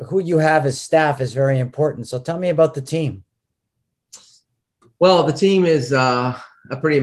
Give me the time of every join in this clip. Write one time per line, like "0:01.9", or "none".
none